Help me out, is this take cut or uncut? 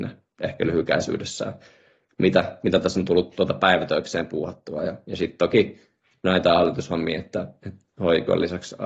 uncut